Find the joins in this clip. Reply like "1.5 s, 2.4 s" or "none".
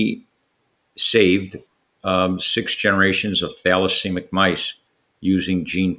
none